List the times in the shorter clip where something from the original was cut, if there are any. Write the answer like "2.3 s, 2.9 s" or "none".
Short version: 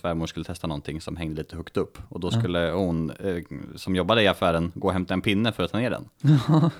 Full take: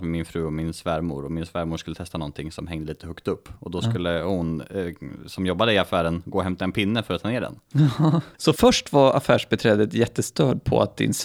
none